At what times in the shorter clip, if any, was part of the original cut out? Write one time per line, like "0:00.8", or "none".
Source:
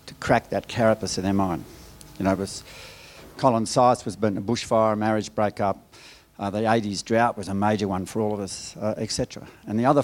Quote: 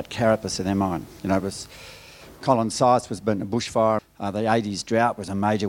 0:01.2
0:04.0